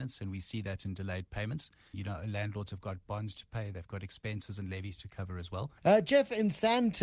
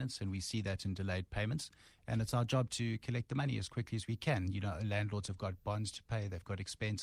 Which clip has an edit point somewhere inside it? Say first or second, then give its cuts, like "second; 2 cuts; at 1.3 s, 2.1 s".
first; 2 cuts; at 1.9 s, 5.8 s